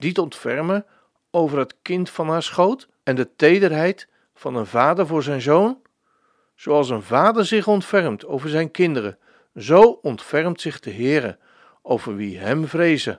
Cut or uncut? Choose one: cut